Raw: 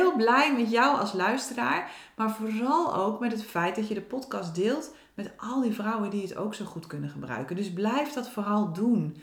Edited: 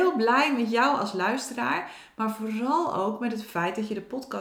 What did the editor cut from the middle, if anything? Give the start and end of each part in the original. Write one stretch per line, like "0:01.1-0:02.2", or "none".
none